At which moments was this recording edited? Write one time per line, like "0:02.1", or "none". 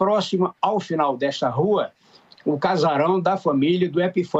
0:02.3